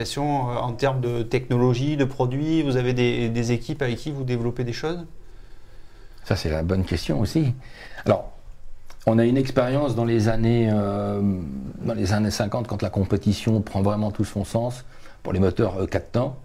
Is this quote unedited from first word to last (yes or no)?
yes